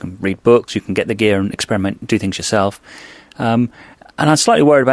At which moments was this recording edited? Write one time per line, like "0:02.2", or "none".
none